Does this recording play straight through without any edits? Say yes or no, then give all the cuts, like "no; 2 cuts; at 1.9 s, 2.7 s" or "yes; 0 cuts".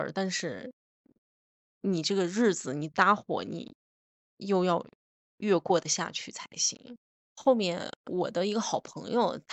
yes; 0 cuts